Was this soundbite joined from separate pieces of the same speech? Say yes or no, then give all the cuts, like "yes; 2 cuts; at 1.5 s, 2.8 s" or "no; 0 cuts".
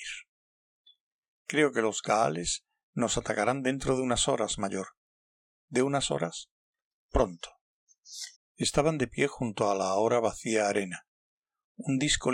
yes; 1 cut; at 8.3 s